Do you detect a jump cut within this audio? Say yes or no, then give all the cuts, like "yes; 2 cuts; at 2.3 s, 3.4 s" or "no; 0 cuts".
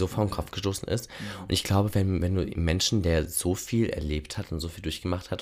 no; 0 cuts